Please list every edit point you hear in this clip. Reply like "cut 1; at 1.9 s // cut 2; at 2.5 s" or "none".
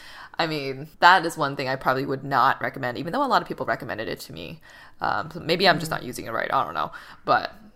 cut 1; at 0.9 s